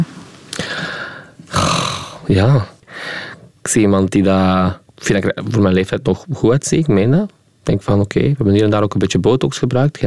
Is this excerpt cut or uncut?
cut